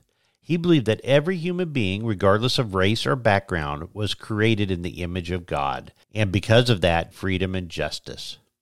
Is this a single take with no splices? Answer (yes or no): no